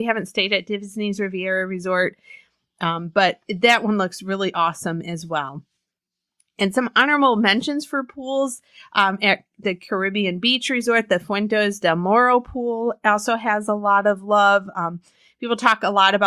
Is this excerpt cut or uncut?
uncut